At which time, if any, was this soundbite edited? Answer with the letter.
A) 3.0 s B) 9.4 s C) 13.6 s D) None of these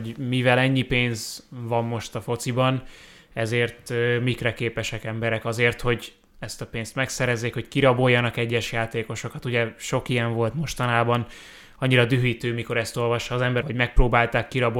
C